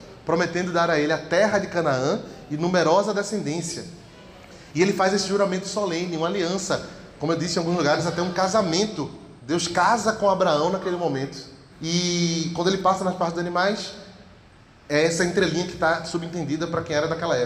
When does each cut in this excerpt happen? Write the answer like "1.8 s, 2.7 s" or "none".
9.4 s, 11.7 s